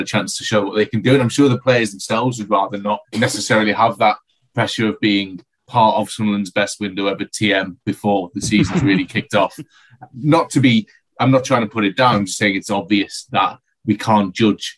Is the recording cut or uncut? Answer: cut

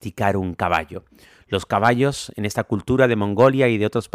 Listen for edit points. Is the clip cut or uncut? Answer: uncut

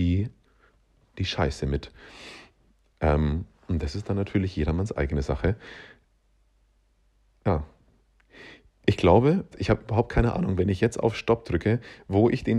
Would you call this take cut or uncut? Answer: cut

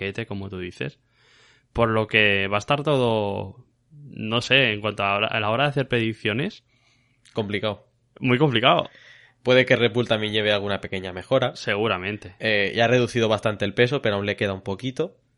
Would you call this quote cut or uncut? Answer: uncut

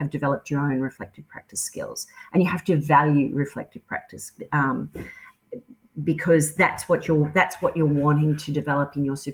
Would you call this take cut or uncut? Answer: uncut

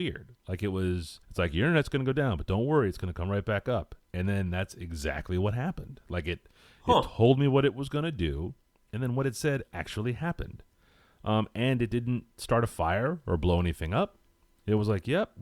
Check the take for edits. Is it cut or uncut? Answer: cut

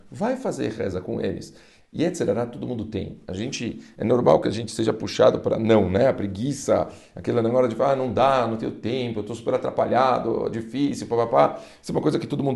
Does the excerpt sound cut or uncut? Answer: uncut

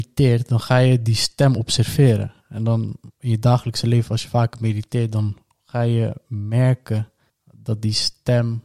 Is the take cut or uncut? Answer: uncut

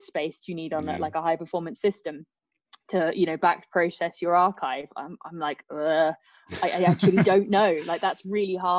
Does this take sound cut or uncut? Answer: uncut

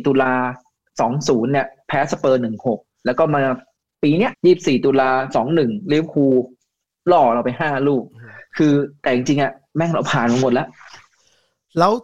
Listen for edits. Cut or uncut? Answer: cut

